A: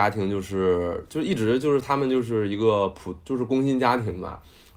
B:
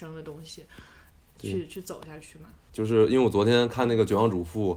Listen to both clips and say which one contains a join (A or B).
B